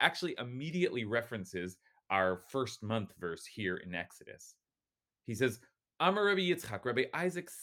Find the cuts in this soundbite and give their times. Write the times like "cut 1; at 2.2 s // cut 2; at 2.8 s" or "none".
none